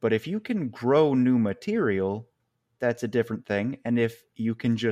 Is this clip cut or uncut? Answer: uncut